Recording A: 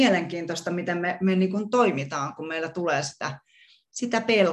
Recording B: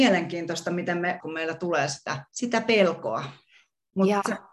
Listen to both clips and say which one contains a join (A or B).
B